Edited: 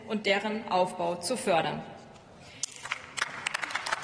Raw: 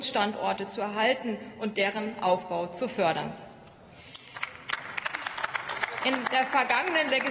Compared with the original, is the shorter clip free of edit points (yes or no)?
yes